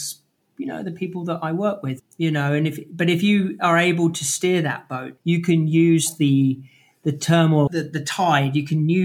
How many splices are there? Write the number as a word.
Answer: three